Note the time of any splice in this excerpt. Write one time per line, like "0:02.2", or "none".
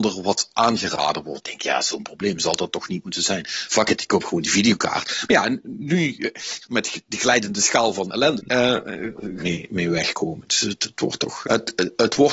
0:08.4
0:09.4
0:11.4